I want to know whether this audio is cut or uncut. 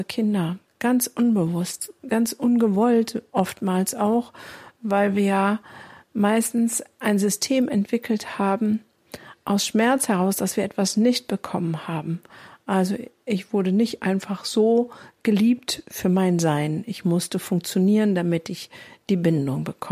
uncut